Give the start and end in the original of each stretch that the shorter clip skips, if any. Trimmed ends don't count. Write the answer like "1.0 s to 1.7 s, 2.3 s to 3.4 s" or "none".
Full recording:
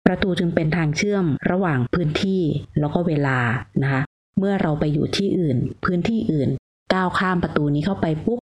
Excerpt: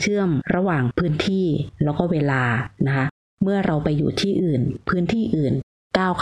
none